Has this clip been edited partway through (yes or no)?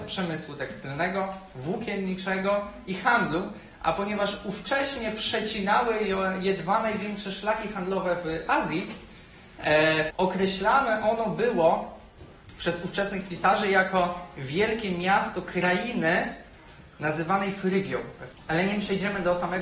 yes